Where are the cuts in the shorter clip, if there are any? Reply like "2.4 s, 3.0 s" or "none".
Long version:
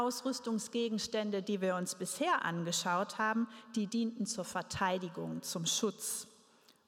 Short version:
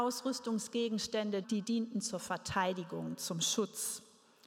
1.4 s